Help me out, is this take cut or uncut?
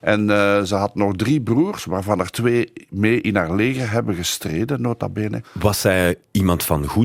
cut